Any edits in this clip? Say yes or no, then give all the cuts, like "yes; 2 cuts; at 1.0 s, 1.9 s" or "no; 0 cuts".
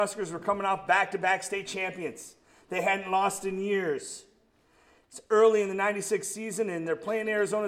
no; 0 cuts